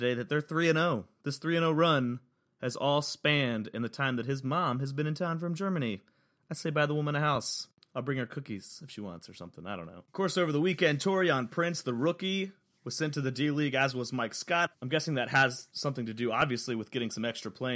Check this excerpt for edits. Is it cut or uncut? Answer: uncut